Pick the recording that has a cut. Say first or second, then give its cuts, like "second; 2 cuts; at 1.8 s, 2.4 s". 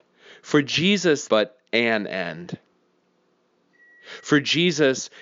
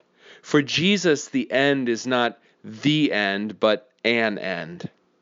first; 1 cut; at 1.3 s